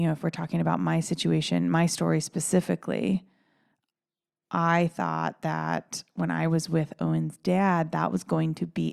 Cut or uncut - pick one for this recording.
uncut